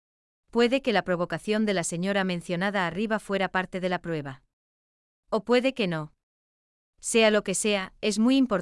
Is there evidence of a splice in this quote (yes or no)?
no